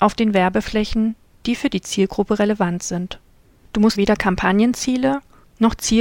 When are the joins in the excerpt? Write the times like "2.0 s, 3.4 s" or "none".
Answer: 3.9 s